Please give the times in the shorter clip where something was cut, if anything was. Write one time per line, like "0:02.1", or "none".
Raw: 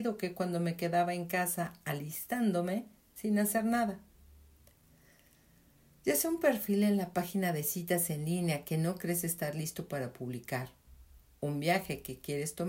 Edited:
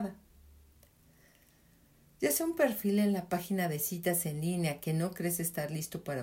none